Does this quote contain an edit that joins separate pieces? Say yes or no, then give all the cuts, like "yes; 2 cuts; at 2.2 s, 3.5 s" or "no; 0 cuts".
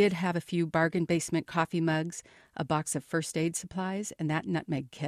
no; 0 cuts